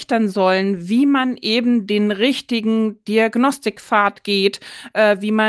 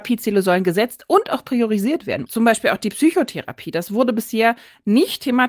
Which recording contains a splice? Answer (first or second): second